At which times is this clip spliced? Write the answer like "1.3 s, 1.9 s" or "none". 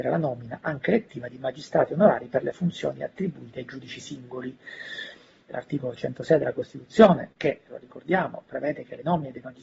5.5 s